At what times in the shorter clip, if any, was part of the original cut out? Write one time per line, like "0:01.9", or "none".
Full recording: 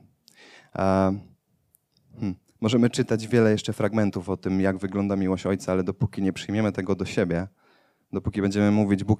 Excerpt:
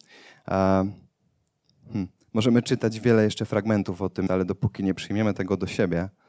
0:04.3